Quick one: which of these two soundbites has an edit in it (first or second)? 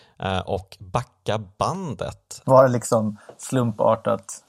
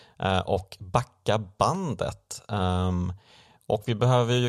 first